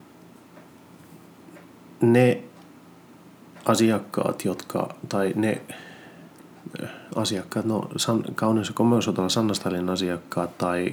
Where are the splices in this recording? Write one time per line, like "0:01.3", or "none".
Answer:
none